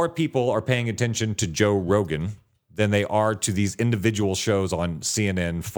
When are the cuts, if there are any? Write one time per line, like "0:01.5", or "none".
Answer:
none